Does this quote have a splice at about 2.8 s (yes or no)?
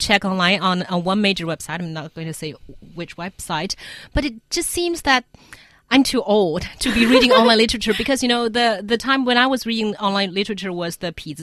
yes